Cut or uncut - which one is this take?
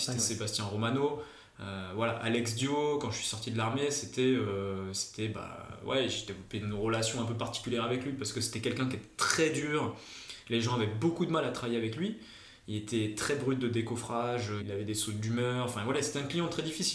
cut